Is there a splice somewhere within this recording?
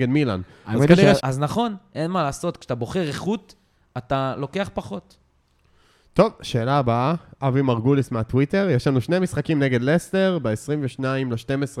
yes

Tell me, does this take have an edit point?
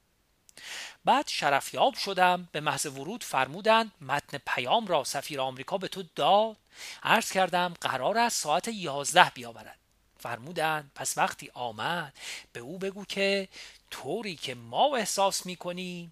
no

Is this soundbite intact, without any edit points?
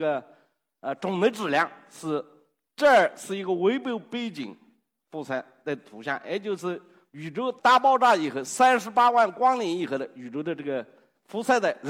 no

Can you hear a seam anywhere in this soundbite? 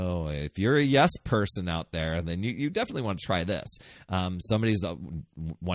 no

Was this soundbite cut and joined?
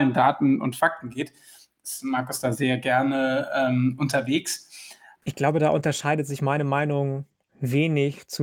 yes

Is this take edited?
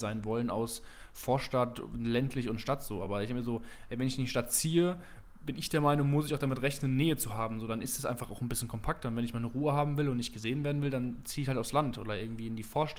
no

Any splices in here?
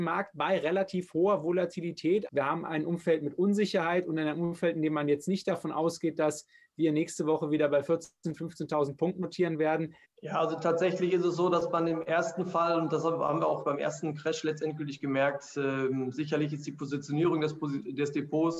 yes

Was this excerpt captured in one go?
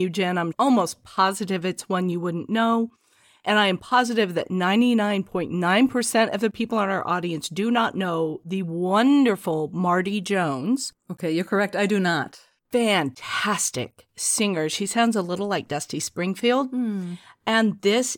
yes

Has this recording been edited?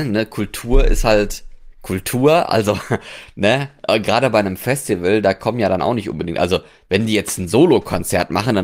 no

